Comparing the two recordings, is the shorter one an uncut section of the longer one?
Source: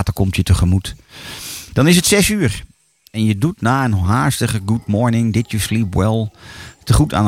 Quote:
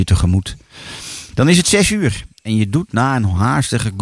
no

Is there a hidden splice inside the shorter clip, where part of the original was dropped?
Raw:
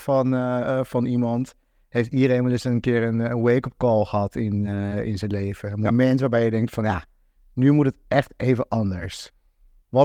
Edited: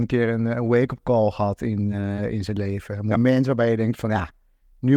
no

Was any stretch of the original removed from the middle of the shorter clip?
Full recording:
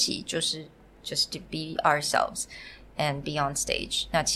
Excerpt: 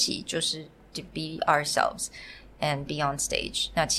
yes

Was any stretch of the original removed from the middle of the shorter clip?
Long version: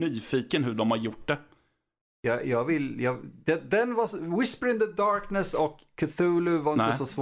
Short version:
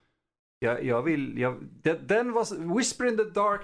no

